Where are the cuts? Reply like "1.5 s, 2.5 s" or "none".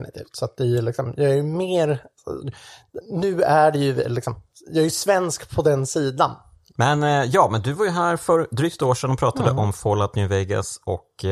6.7 s